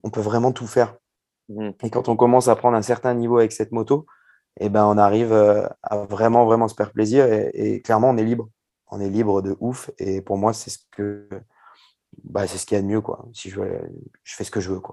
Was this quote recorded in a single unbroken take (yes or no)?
yes